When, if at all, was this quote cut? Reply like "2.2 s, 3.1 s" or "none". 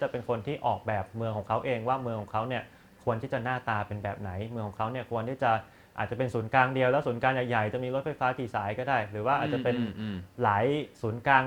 none